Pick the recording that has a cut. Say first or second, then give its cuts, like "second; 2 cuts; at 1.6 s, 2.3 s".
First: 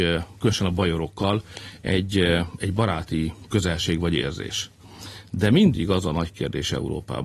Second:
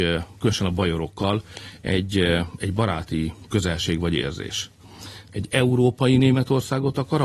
second; 1 cut; at 5.3 s